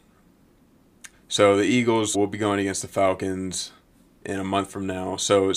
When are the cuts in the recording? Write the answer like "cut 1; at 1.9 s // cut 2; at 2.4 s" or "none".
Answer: cut 1; at 1.1 s // cut 2; at 2.1 s